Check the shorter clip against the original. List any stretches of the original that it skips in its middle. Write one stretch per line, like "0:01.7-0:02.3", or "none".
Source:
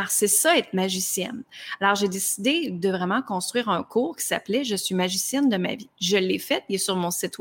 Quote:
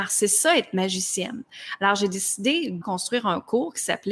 0:02.8-0:03.2